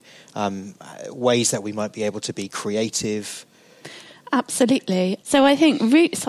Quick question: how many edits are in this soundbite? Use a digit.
1